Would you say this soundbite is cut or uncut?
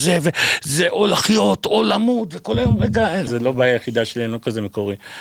cut